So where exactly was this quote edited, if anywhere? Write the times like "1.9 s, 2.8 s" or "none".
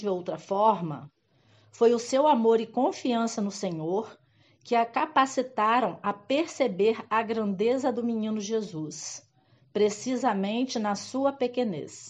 none